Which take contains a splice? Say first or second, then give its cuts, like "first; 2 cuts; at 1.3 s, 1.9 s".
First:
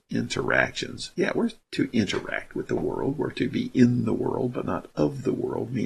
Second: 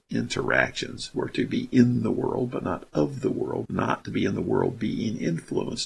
second; 2 cuts; at 1.1 s, 3.7 s